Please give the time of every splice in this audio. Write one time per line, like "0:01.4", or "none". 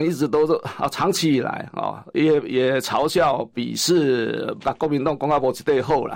0:04.6